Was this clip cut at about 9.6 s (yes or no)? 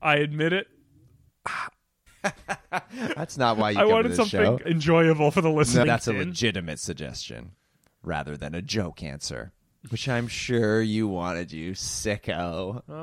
no